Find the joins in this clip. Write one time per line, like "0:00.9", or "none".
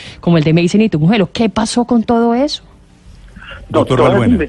none